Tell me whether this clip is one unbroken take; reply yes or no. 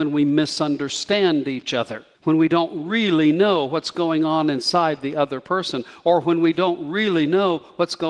no